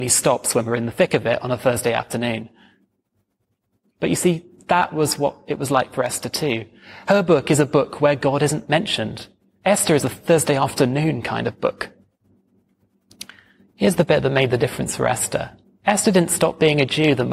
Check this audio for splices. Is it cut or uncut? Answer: uncut